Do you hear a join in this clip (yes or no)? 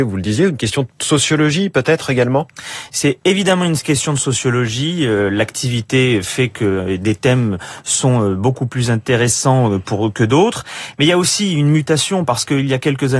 no